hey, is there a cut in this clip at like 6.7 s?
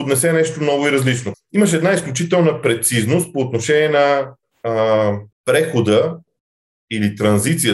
no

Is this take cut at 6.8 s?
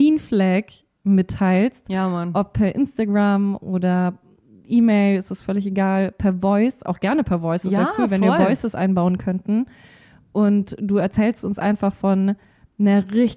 no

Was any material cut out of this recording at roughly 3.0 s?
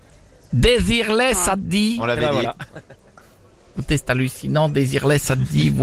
no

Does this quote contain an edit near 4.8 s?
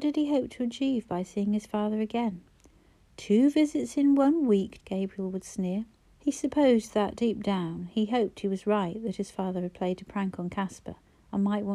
yes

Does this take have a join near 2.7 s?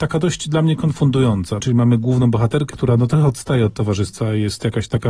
yes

